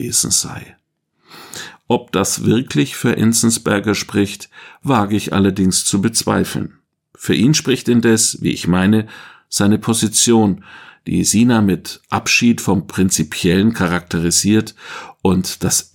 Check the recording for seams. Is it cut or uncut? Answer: uncut